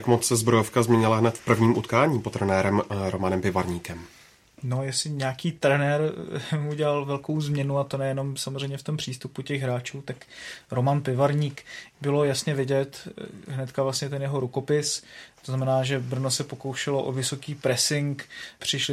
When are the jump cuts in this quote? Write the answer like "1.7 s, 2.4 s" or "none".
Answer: none